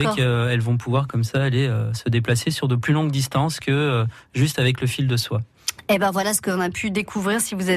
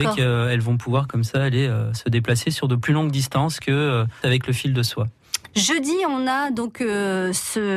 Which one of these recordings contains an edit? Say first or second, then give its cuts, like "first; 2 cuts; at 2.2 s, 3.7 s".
second; 2 cuts; at 4.2 s, 5.5 s